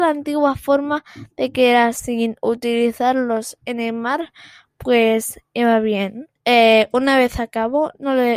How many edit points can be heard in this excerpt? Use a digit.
1